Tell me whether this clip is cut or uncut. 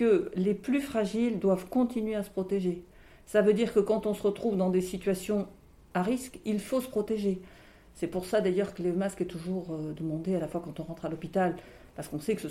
uncut